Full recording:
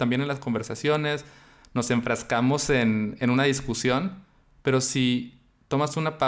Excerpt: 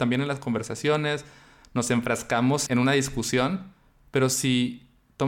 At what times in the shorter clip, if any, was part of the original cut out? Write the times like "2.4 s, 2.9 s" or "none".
2.7 s